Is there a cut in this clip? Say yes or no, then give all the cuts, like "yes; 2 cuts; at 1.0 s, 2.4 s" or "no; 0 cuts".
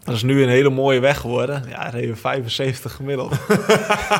no; 0 cuts